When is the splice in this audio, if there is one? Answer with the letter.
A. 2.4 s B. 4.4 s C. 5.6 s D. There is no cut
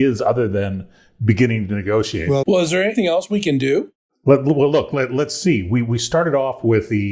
A